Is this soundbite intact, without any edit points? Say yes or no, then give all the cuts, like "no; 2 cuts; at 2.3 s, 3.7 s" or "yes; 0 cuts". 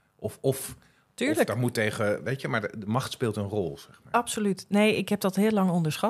yes; 0 cuts